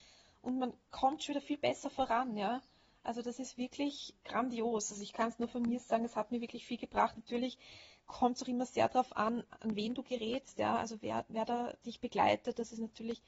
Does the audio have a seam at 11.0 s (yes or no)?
no